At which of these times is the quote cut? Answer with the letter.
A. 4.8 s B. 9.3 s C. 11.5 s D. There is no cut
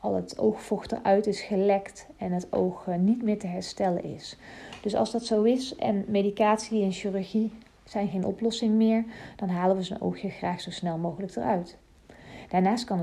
D